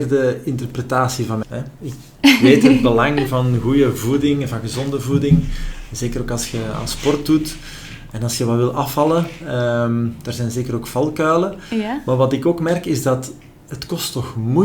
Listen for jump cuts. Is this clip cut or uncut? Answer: cut